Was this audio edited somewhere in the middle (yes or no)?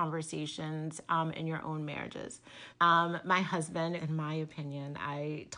yes